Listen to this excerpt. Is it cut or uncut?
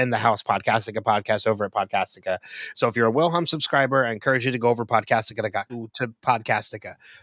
cut